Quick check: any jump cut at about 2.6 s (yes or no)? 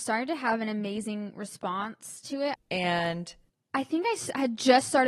yes